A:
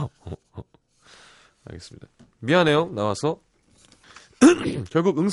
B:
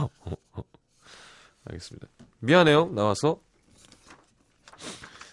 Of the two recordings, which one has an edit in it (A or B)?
A